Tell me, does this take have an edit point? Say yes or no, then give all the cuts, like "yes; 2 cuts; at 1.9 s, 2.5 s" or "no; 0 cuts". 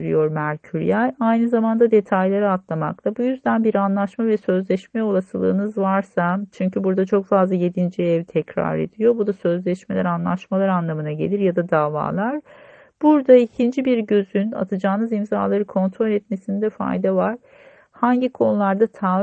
no; 0 cuts